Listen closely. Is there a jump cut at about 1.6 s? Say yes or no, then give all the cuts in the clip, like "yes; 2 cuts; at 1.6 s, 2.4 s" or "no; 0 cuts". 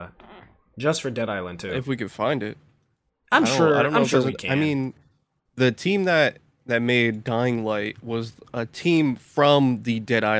no; 0 cuts